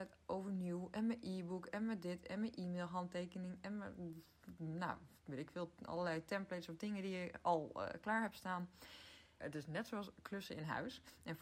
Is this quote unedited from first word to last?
no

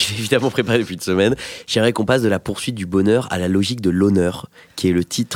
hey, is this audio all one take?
yes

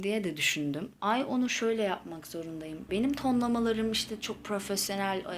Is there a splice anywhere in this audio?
yes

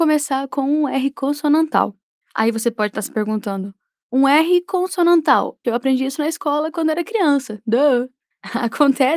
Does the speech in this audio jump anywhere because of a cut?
yes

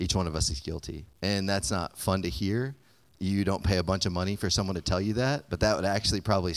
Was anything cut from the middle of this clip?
yes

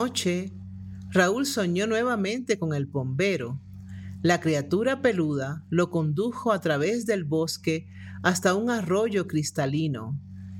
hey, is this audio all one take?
yes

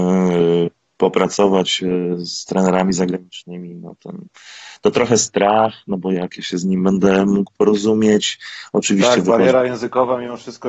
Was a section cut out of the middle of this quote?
no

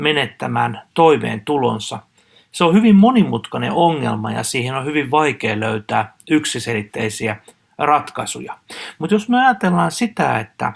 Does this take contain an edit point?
no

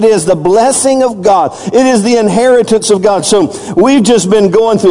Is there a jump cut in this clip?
no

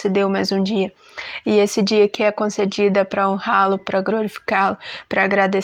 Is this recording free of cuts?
yes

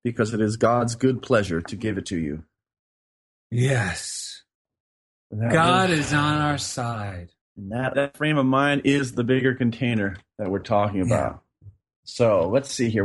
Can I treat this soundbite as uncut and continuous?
no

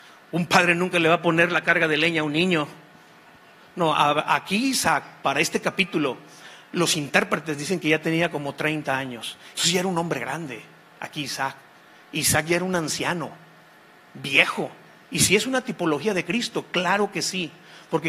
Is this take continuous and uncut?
no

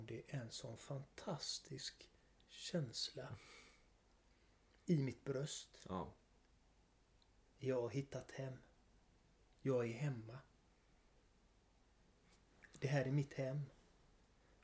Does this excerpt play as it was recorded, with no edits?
yes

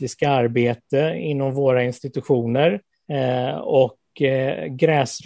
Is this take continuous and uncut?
no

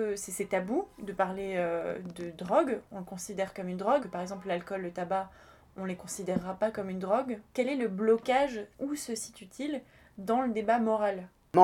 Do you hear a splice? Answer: yes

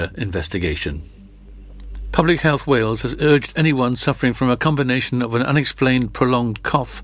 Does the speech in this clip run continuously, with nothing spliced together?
yes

